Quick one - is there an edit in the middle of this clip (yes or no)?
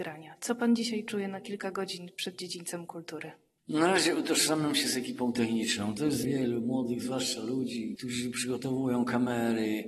yes